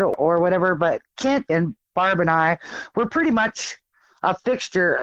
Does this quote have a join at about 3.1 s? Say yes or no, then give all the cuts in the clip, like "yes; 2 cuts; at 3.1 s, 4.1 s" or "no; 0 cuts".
no; 1 cut; at 1.5 s